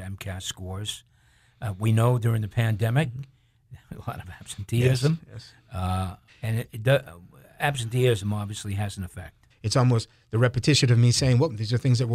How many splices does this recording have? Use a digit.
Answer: 2